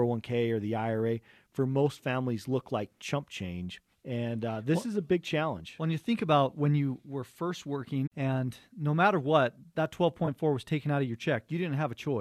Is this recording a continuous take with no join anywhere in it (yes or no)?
no